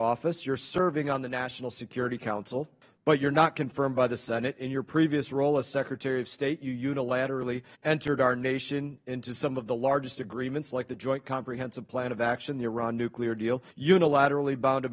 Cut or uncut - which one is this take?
uncut